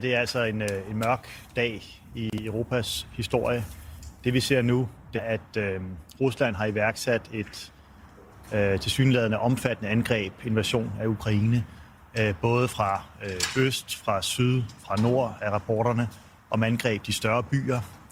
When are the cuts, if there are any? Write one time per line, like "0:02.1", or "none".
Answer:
0:05.2